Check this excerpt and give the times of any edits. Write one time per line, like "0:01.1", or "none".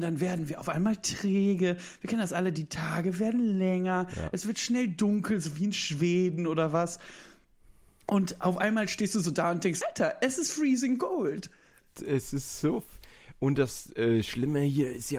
0:09.8